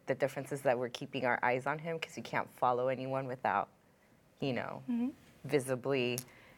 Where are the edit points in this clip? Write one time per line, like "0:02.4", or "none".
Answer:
none